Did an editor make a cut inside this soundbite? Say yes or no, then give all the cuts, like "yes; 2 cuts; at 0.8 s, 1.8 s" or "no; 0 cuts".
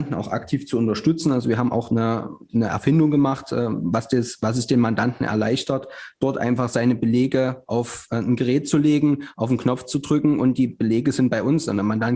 no; 0 cuts